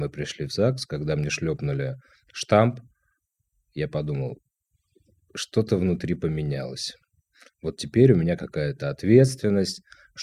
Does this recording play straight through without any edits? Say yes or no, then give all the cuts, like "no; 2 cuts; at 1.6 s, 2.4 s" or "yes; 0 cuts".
yes; 0 cuts